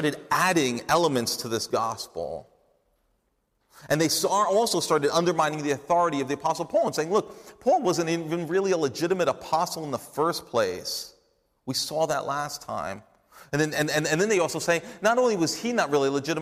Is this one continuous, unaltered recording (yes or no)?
yes